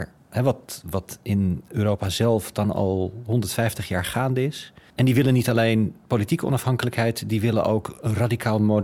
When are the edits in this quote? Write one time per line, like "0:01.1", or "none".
0:04.9